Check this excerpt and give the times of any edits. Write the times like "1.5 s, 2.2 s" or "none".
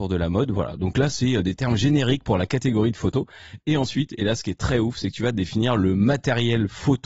none